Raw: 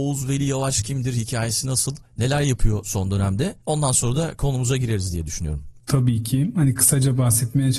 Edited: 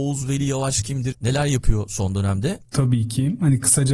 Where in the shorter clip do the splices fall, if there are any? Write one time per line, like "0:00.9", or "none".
0:01.1
0:02.6